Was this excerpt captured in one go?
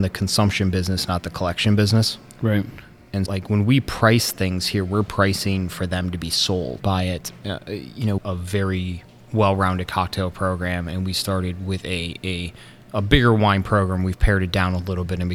no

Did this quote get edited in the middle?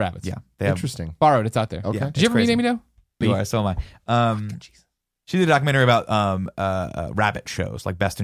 yes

